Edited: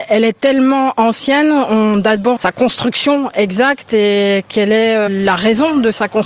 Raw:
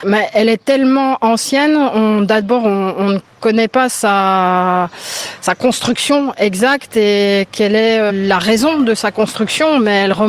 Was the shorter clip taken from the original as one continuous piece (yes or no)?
no